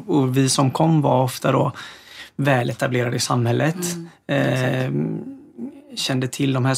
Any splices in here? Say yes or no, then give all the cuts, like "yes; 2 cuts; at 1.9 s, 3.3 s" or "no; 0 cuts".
no; 0 cuts